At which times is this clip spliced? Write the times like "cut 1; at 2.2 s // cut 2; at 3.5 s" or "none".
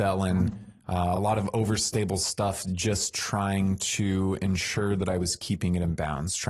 none